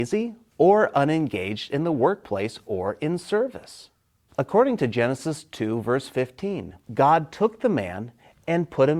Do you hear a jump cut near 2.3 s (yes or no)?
no